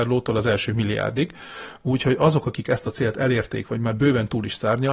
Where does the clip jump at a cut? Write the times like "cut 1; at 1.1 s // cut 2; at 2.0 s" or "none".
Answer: none